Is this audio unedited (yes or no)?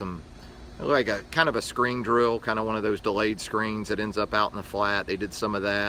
yes